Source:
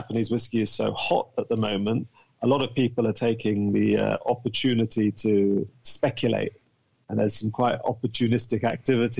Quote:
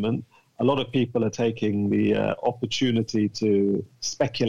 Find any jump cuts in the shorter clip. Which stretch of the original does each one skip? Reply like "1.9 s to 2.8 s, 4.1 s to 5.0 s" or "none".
none